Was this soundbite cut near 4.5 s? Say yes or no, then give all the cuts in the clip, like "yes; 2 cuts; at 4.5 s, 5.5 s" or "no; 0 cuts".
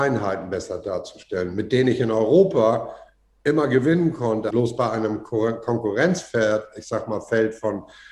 yes; 1 cut; at 4.5 s